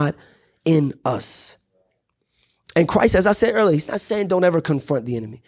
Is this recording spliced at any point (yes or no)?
no